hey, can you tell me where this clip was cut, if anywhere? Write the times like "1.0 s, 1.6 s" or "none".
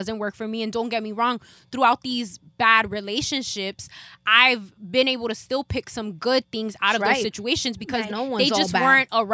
8.1 s